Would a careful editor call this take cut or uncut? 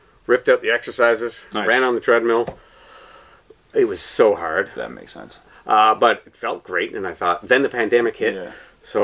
cut